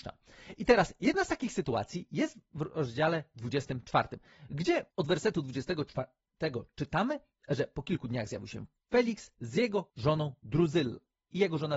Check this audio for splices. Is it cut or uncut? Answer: uncut